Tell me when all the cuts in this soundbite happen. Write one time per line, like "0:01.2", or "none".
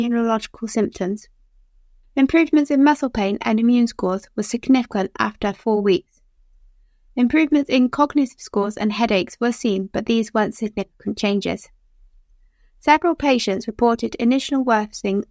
none